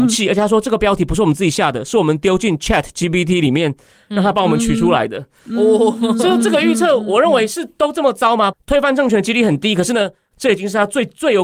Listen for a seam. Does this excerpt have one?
yes; 2 cuts; at 8.5 s, 10.3 s

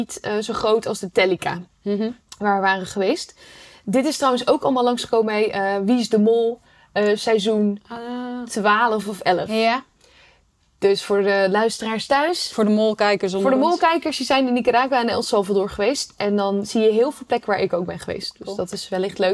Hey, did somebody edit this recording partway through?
no; 0 cuts

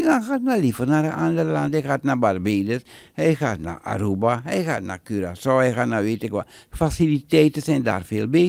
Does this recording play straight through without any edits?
yes; 0 cuts

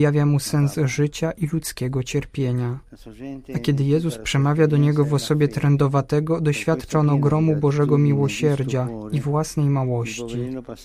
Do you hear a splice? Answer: no; 0 cuts

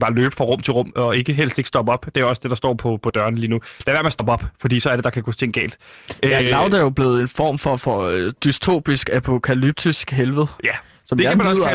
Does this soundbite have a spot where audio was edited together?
no; 0 cuts

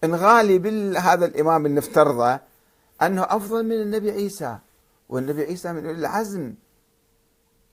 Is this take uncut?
yes; 0 cuts

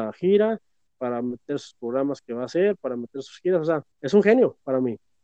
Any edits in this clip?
yes; 1 cut; at 3.9 s

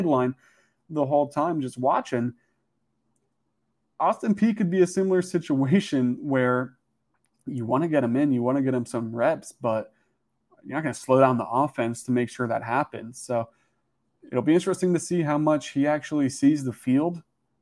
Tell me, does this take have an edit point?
no; 0 cuts

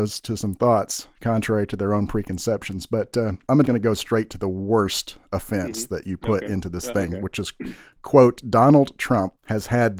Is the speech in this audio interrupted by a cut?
yes; 1 cut; at 3.6 s

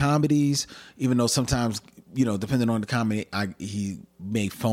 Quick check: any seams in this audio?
no; 0 cuts

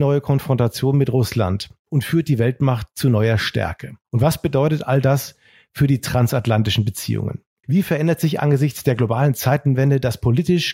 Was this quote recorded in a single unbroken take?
no; 2 cuts; at 4.0 s, 7.6 s

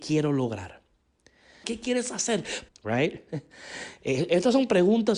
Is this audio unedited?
no; 2 cuts; at 1.6 s, 2.7 s

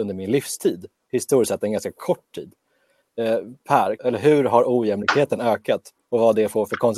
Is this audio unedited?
no; 1 cut; at 4.0 s

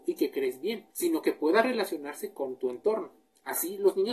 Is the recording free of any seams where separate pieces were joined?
no; 1 cut; at 0.9 s

